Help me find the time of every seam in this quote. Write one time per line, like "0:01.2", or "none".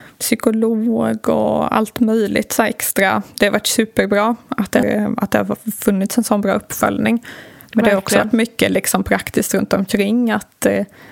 0:04.8